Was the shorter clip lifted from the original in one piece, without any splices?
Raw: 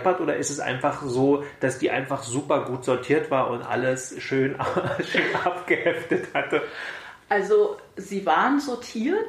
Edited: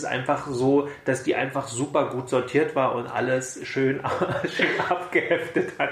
yes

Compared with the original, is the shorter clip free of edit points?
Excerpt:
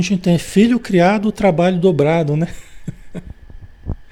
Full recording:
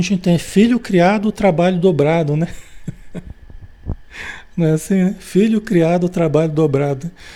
yes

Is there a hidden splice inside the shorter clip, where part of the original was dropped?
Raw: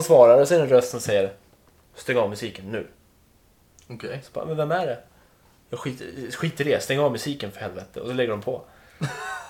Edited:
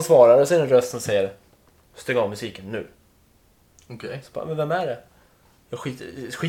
no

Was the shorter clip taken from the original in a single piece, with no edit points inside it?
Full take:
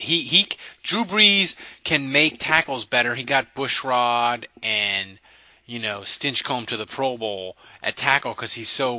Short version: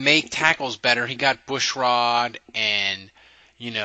yes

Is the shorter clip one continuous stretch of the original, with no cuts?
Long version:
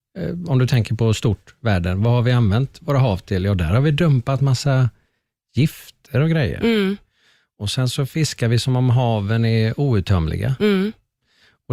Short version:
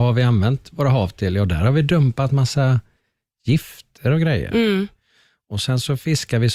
yes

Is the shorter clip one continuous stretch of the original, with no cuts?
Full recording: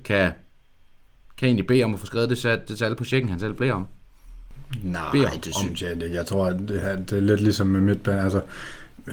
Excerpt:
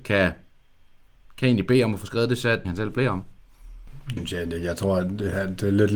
no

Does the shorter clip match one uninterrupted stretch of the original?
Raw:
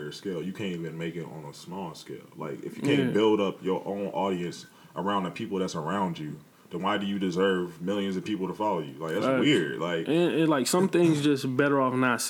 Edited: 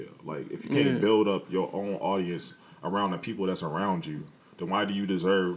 yes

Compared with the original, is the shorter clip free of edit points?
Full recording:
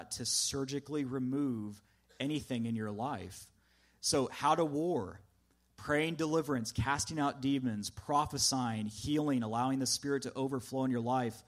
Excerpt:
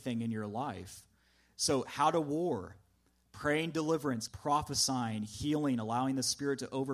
no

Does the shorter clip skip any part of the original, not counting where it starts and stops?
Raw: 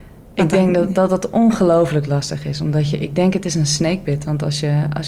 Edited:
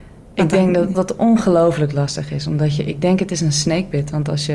yes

